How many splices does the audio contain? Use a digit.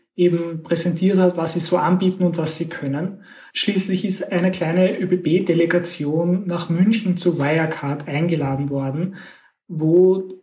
1